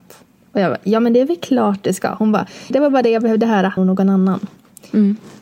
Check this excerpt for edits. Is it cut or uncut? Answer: cut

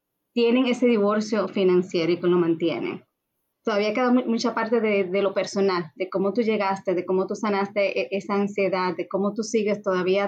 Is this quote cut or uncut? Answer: uncut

